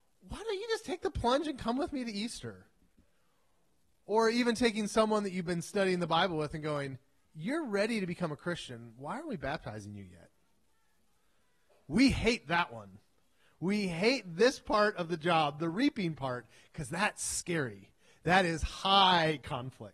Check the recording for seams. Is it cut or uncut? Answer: uncut